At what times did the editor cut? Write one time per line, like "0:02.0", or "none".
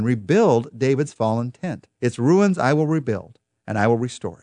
0:01.9